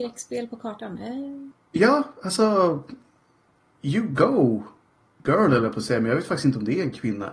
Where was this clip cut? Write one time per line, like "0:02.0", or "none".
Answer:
none